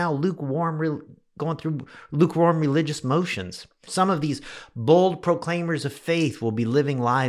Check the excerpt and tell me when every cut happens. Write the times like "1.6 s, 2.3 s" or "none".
3.9 s